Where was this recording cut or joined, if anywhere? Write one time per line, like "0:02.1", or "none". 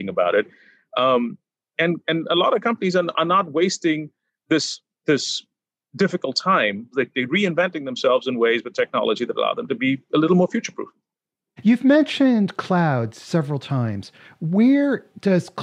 0:06.9